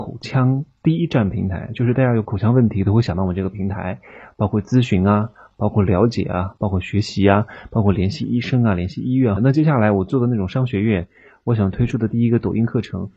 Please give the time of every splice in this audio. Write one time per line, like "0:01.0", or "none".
0:09.4

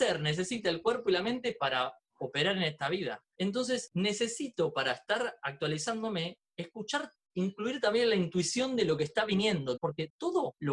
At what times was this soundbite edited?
0:03.3
0:09.8

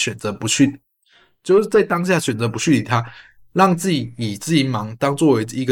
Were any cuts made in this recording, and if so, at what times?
none

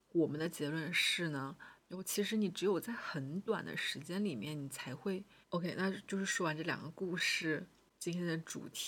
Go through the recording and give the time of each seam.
0:01.8
0:05.4

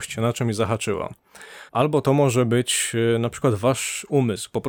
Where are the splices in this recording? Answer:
0:01.7

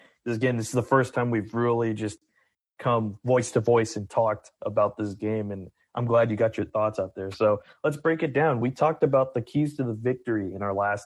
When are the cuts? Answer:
none

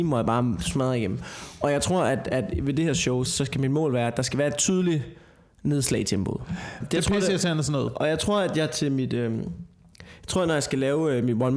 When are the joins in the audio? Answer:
0:03.3
0:06.8

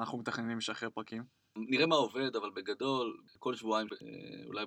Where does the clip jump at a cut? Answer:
none

